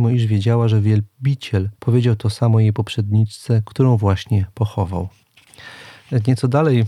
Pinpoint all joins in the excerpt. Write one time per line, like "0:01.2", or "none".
0:01.8

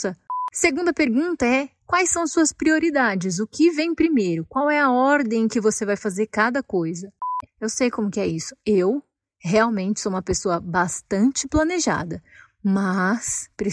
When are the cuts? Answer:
0:07.5

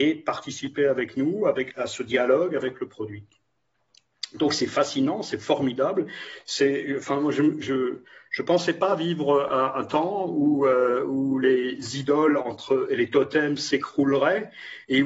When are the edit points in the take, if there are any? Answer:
none

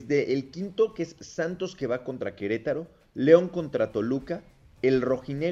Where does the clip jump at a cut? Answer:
none

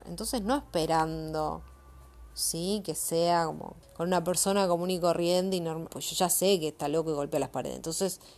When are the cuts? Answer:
0:03.8
0:05.9

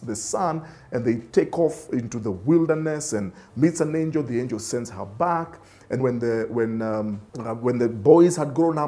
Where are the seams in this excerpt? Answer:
0:06.0
0:07.3

